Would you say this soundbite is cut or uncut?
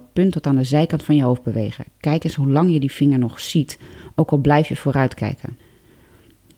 uncut